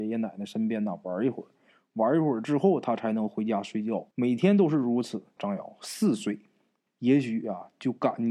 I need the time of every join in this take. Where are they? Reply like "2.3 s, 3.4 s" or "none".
4.1 s, 5.4 s, 6.9 s